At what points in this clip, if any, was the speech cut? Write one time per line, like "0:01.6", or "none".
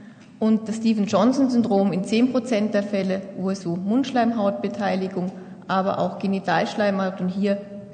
0:03.6

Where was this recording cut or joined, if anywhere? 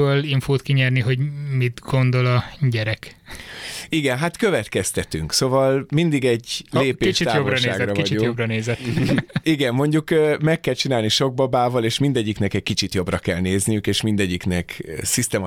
none

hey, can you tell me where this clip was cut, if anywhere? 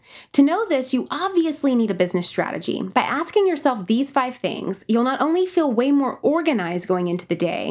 0:02.9

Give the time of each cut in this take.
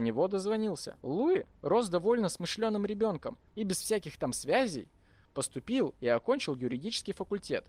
0:01.0
0:03.5

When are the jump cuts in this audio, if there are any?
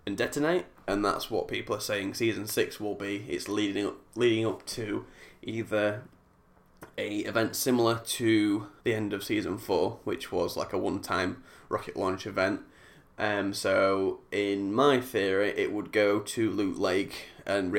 none

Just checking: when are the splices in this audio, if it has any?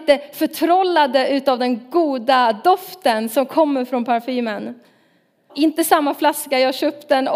0:05.5

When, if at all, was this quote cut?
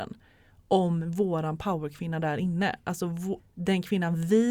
0:03.4

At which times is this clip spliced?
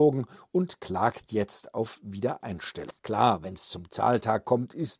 0:03.0

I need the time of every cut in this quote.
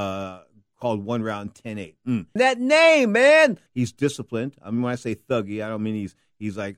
0:02.4
0:03.7

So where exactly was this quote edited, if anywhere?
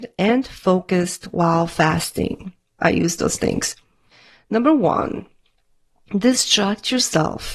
0:02.8

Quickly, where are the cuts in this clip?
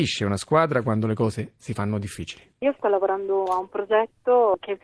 0:02.5

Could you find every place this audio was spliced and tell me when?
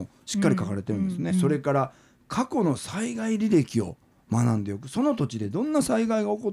0:01.3

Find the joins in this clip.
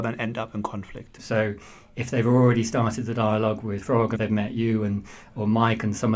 0:01.2
0:04.1

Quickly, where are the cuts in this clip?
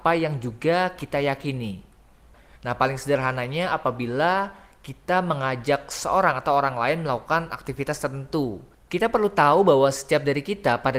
0:02.3
0:08.7

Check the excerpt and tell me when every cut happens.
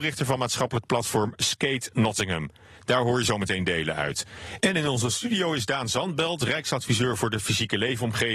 none

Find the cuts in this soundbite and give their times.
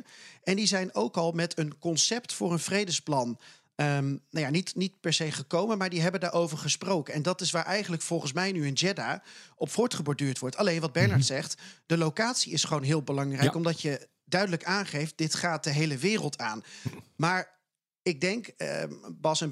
none

